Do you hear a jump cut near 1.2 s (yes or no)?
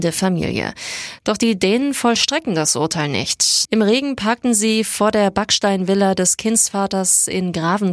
yes